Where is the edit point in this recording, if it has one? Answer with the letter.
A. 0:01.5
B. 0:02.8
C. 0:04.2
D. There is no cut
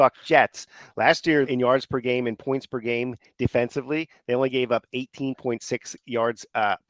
A